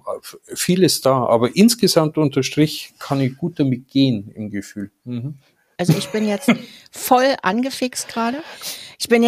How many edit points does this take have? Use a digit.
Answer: 1